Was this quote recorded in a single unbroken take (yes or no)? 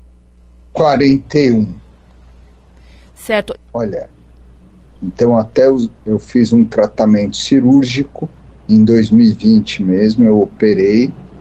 no